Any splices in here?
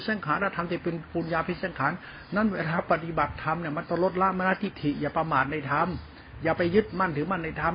no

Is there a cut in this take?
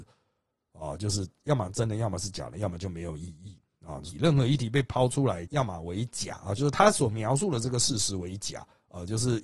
yes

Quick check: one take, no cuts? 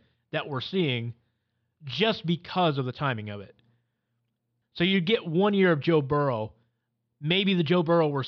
no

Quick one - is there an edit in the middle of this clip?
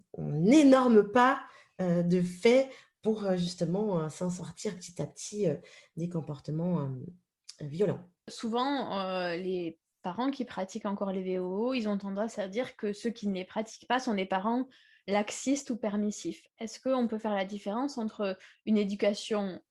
no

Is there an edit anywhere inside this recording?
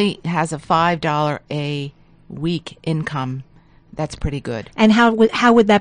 no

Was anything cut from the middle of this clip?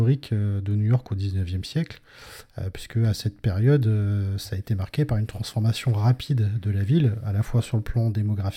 no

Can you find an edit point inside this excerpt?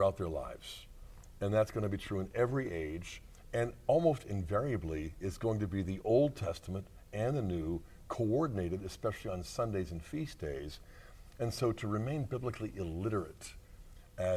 yes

